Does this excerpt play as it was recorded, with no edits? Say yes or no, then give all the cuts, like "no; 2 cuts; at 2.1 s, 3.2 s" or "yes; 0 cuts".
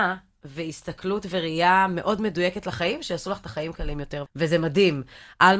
no; 1 cut; at 4.3 s